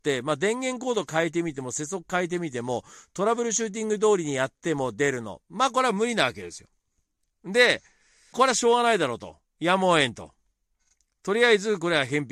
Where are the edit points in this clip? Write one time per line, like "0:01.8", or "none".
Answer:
0:08.3